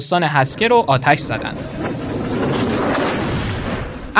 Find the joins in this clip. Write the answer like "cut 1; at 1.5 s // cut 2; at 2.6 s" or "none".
none